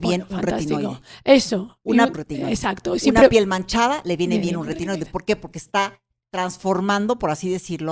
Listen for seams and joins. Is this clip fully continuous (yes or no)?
no